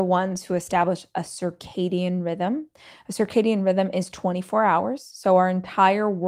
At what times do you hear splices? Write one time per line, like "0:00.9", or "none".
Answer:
none

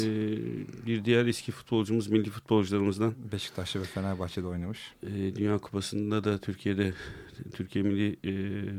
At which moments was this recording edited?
none

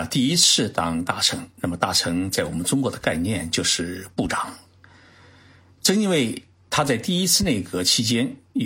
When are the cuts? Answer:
none

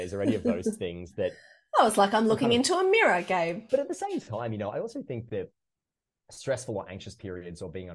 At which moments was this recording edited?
0:03.7

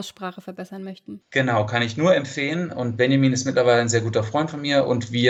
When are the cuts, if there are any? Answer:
0:01.2

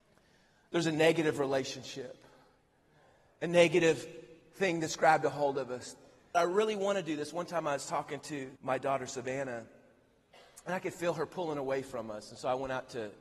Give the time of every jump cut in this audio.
0:06.3
0:08.6

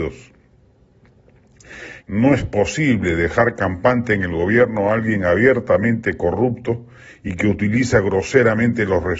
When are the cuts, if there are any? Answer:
0:02.0

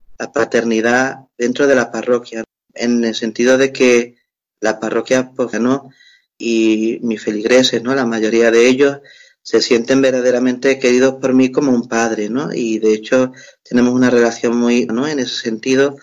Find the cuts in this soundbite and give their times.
0:05.5
0:14.9

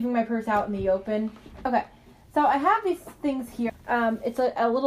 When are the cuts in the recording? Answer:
0:03.7

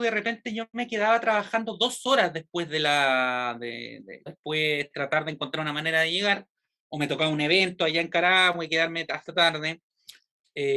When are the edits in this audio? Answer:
0:04.3

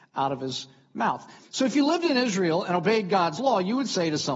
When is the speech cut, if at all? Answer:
0:01.4

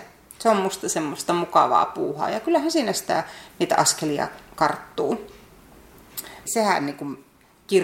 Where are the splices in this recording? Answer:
0:06.5

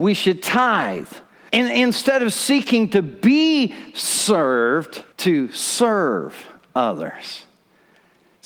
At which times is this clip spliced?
0:01.5
0:05.1

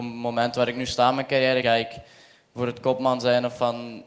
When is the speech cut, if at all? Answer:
0:01.6

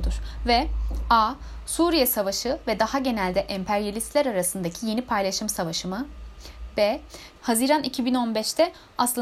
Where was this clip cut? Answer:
0:07.4

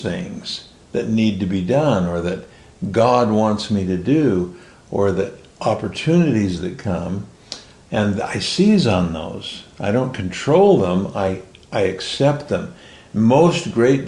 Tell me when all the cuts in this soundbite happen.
none

